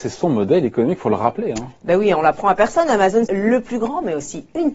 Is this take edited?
yes; 1 cut; at 3.3 s

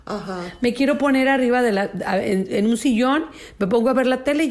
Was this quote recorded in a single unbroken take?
yes; 0 cuts

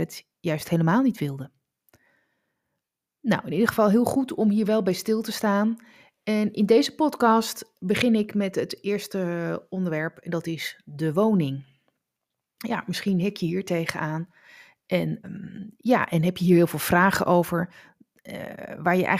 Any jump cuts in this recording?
yes; 1 cut; at 15.2 s

